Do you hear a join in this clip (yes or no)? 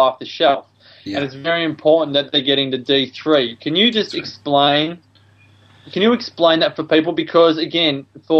no